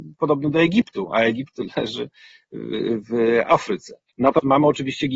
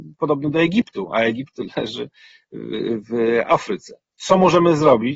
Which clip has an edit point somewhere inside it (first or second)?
first